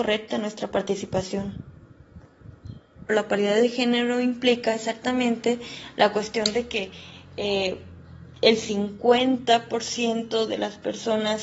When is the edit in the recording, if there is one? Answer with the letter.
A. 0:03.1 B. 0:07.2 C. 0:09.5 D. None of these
A